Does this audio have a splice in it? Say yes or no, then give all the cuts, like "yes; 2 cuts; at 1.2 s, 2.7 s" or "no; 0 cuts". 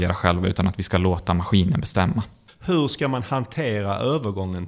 yes; 1 cut; at 2.5 s